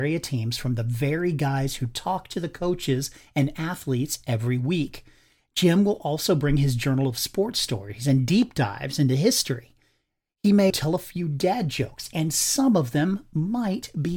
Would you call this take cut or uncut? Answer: cut